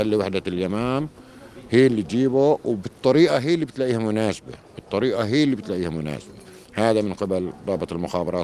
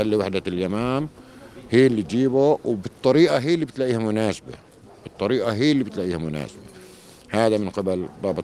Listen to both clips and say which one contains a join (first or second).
first